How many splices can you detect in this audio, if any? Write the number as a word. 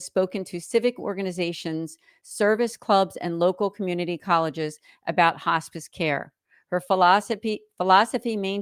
zero